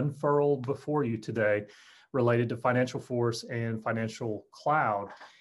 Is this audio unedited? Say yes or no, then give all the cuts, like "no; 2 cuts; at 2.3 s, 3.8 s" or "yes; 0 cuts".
yes; 0 cuts